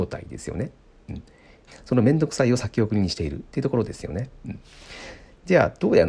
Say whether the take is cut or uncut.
cut